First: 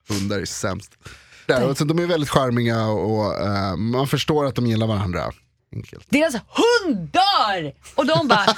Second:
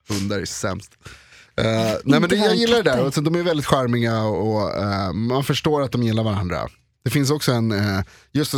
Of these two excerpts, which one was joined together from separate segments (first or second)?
first